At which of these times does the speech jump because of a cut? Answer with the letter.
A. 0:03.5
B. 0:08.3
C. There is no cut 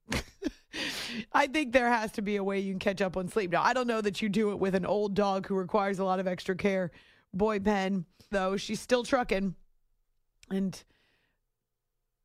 B